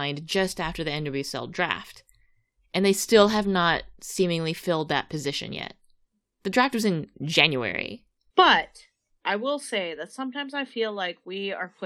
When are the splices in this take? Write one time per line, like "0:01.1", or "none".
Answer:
0:08.3